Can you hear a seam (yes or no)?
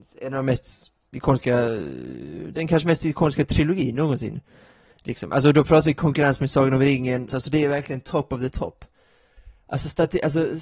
yes